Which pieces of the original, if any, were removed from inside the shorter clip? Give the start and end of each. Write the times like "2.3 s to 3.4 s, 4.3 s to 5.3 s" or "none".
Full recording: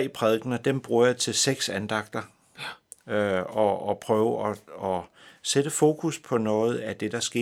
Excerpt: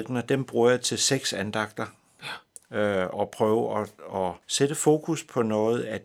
3.5 s to 3.8 s, 5.1 s to 5.4 s